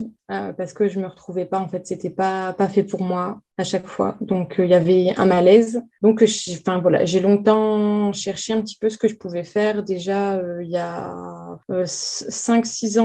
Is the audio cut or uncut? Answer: uncut